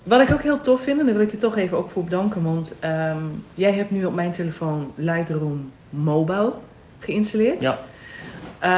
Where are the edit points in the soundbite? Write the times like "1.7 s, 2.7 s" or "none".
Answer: 5.8 s